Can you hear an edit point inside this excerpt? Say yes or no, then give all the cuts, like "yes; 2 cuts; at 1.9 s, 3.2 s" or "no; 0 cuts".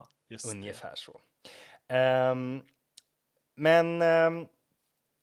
no; 0 cuts